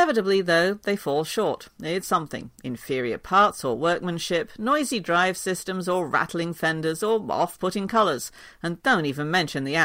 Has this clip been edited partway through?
yes; 1 cut; at 2.0 s

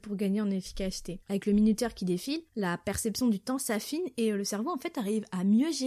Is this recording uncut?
yes; 0 cuts

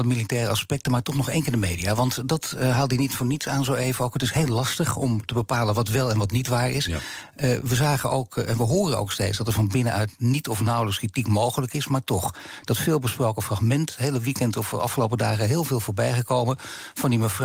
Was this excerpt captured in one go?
yes; 0 cuts

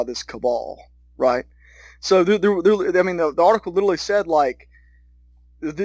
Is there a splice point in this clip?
no; 0 cuts

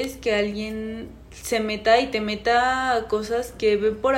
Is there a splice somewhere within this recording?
no; 0 cuts

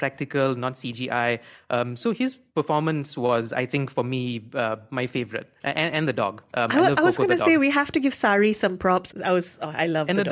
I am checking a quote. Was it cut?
yes; 1 cut; at 9.1 s

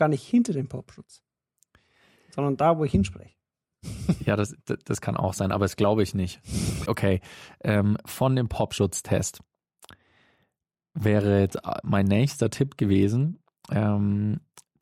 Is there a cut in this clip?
yes; 1 cut; at 6.9 s

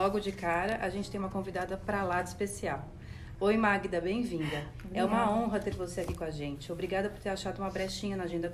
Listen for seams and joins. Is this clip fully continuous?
no; 1 cut; at 3.4 s

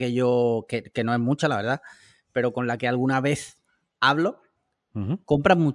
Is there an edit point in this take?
no; 0 cuts

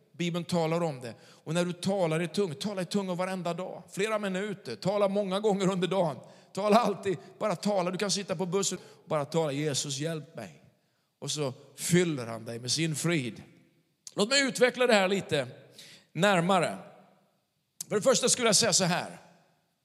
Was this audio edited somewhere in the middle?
yes; 1 cut; at 8.8 s

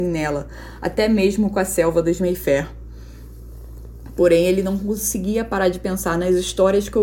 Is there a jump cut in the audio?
no; 0 cuts

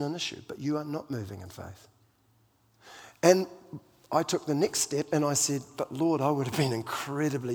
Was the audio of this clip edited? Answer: no; 0 cuts

